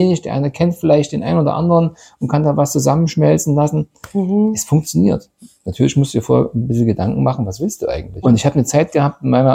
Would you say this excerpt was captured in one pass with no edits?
no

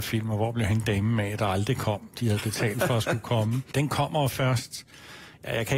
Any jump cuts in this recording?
yes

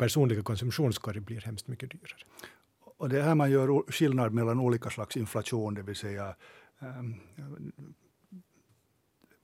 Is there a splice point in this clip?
no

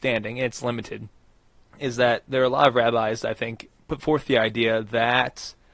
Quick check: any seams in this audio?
yes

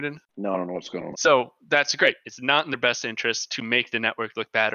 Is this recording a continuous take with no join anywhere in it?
no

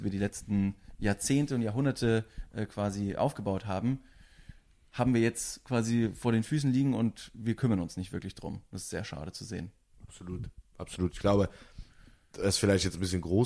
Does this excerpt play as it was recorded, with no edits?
yes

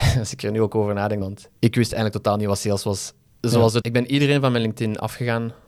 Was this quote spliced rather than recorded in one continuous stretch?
yes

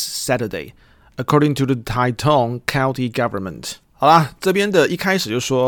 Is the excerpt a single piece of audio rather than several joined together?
no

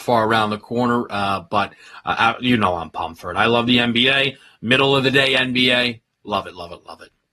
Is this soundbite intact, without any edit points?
yes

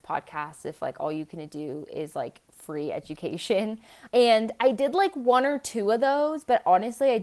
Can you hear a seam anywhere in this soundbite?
yes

